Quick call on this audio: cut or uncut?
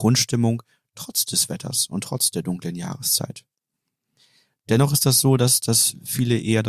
uncut